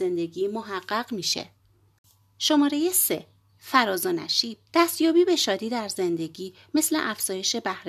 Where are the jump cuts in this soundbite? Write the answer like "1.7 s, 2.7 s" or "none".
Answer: 4.7 s